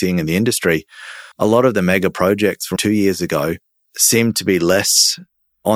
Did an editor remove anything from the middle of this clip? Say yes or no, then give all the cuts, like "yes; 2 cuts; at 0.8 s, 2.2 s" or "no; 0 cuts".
yes; 2 cuts; at 1.3 s, 2.8 s